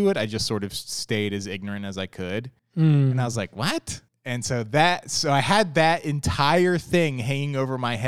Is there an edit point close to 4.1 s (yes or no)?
yes